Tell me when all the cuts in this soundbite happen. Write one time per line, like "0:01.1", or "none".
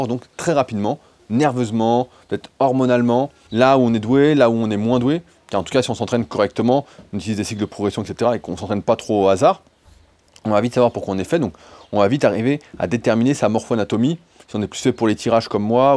0:03.5